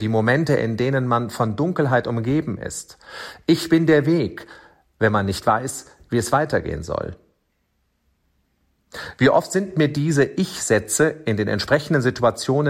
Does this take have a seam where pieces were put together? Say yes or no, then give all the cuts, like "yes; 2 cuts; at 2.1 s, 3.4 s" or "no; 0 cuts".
no; 0 cuts